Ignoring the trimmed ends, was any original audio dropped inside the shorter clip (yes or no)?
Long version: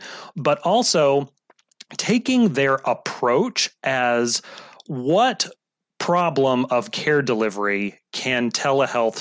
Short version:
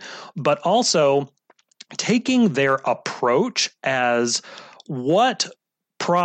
no